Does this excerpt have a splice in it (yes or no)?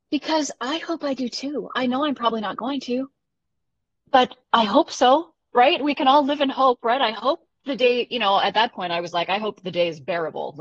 no